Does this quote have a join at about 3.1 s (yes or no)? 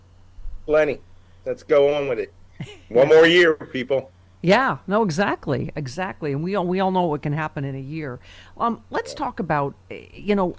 no